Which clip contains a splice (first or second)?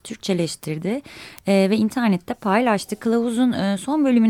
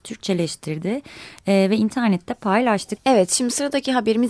second